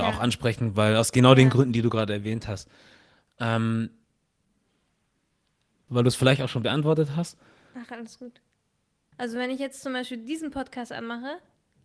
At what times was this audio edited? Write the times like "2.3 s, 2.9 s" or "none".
5.9 s, 9.1 s